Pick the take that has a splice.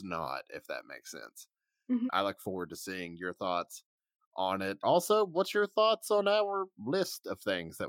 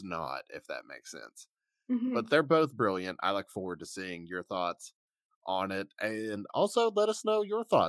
first; 2 cuts; at 2.1 s, 4.8 s

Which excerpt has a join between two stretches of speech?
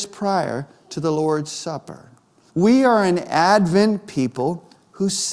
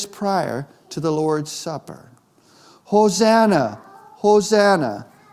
first; 1 cut; at 2.5 s

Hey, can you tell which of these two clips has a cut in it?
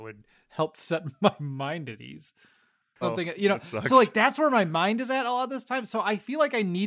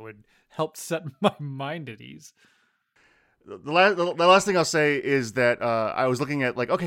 first; 1 cut; at 3.0 s

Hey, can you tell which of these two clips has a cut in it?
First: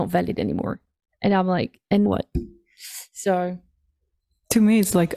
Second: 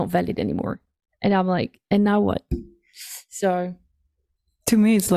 first; 1 cut; at 2.1 s

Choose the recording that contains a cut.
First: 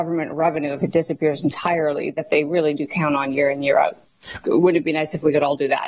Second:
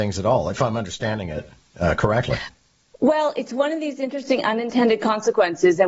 first; 1 cut; at 4.4 s

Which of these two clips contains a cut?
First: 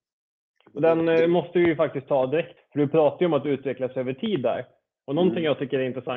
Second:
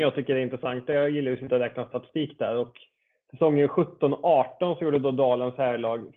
first; 1 cut; at 2.6 s

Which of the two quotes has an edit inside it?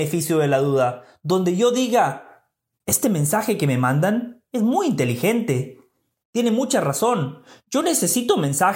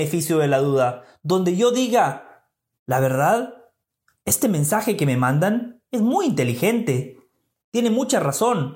first; 1 cut; at 2.8 s

